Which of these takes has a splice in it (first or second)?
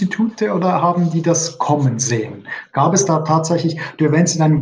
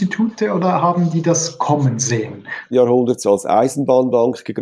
second